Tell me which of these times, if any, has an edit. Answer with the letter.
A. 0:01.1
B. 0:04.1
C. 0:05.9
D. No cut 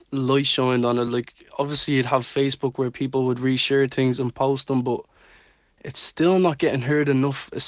D